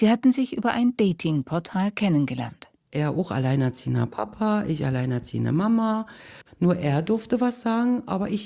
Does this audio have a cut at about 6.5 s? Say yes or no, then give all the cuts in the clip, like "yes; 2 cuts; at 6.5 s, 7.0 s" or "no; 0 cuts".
yes; 1 cut; at 6.5 s